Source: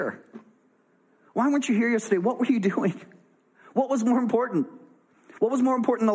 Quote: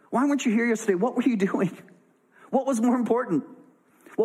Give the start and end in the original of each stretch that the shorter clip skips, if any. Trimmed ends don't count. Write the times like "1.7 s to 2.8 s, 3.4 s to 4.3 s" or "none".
none